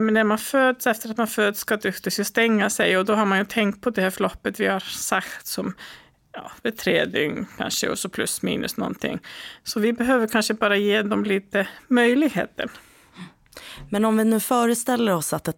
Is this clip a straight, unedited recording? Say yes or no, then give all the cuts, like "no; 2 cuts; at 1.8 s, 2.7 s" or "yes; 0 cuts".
no; 1 cut; at 9.6 s